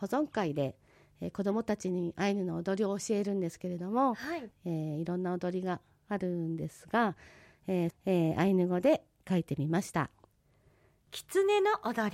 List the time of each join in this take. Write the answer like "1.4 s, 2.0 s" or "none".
4.5 s, 7.9 s